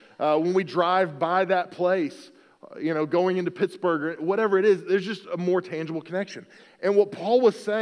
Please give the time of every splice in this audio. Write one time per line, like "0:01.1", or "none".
none